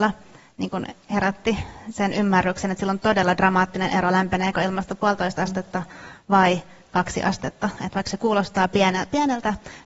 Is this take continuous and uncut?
yes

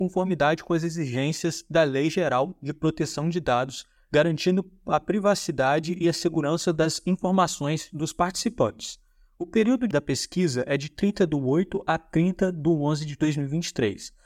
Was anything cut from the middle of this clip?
yes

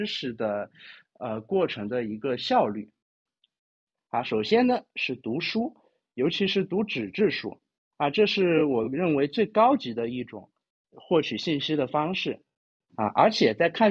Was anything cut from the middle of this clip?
yes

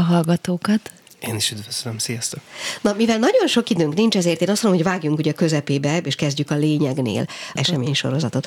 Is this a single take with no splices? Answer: no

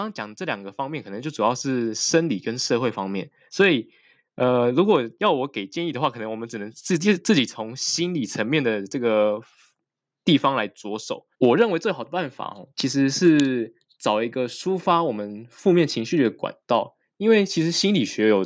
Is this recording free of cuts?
no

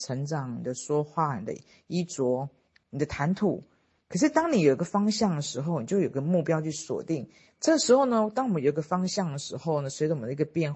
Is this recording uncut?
no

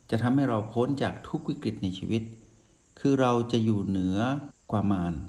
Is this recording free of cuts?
yes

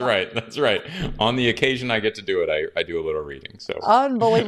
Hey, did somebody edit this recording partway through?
no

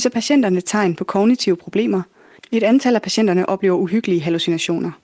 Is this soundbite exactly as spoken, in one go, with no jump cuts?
no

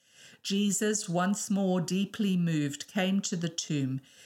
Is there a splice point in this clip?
no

